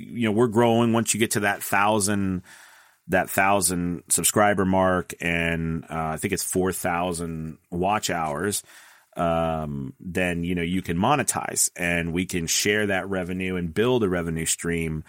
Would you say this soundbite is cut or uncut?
uncut